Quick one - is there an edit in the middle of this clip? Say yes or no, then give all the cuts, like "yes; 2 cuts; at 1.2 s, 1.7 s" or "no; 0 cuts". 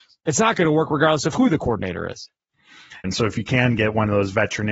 yes; 1 cut; at 3.0 s